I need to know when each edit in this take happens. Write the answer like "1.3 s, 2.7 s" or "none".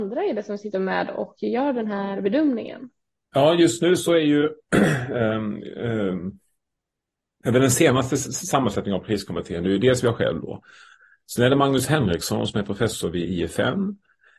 none